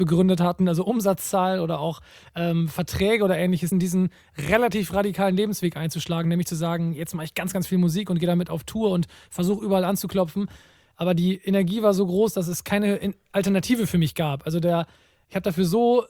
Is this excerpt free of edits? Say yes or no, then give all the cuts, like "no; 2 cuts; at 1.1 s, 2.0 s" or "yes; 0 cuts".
no; 1 cut; at 3.7 s